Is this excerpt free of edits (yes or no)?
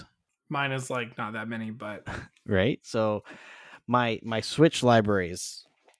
yes